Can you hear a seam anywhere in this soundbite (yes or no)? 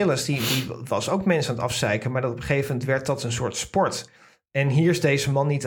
no